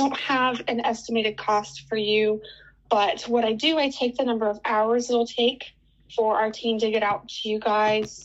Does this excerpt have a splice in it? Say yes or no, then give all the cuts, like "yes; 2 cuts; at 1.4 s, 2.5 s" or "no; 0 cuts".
no; 0 cuts